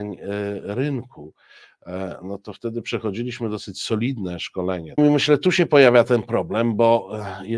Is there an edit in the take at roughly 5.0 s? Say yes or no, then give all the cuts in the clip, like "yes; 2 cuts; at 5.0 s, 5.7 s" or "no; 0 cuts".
yes; 1 cut; at 5.0 s